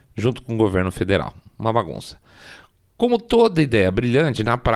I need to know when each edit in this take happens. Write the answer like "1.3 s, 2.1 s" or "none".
none